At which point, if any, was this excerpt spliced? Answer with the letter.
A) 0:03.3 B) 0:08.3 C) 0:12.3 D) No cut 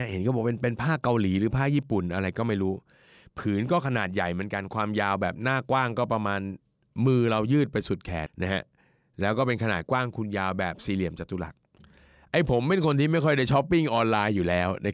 B